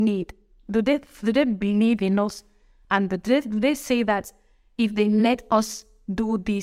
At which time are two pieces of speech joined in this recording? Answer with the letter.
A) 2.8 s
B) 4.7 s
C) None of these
C